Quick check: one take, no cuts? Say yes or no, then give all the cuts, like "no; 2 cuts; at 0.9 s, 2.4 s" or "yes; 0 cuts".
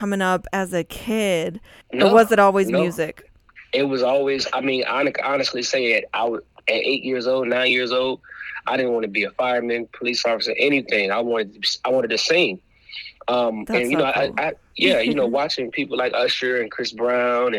no; 1 cut; at 1.8 s